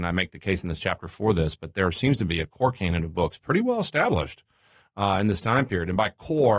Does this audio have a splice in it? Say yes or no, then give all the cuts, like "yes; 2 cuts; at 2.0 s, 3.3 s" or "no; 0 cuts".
no; 0 cuts